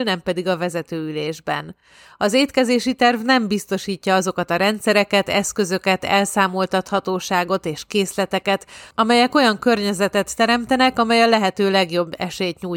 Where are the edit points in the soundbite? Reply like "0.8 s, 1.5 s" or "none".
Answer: none